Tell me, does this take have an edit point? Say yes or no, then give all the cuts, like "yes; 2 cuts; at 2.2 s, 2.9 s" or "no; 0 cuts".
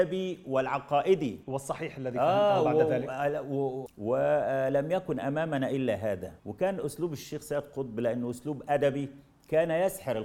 yes; 2 cuts; at 3.9 s, 6.4 s